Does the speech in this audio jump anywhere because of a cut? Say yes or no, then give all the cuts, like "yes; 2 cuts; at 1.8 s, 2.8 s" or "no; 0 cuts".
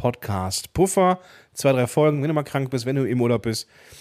no; 0 cuts